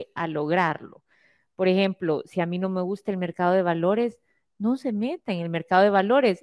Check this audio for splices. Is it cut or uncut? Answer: uncut